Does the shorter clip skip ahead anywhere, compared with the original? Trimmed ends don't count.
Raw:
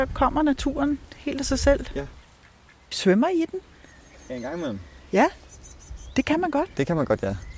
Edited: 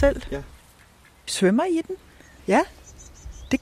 yes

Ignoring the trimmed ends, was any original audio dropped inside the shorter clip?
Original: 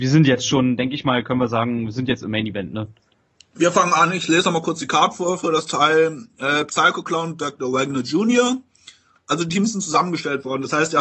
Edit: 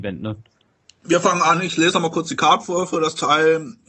no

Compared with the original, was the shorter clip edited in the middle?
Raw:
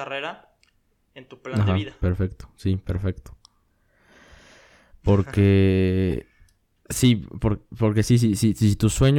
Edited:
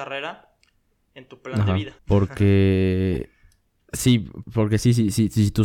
yes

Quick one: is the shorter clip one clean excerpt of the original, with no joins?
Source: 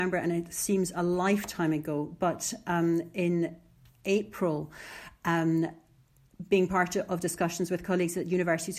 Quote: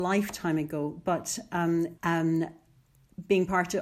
no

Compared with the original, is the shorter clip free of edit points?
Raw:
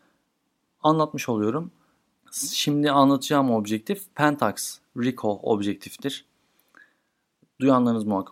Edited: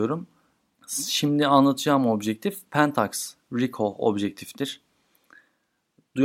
yes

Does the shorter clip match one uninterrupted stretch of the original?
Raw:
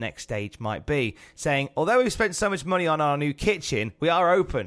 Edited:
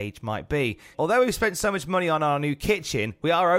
no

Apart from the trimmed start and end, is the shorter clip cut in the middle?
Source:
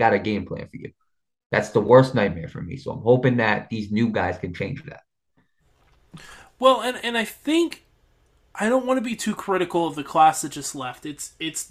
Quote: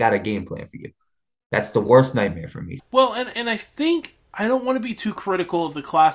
yes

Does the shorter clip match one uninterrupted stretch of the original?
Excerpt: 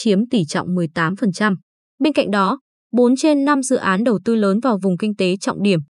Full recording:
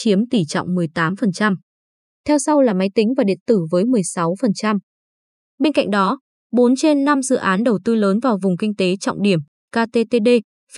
no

